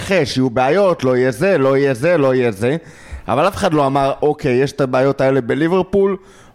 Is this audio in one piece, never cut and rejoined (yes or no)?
no